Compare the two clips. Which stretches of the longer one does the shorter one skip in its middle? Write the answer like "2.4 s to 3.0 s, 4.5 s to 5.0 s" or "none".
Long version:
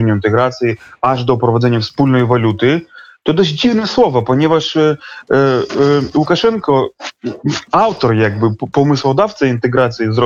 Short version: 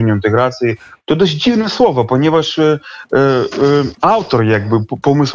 1.0 s to 3.2 s, 6.1 s to 7.6 s